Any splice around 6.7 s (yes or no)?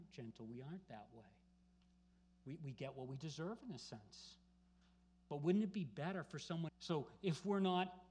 yes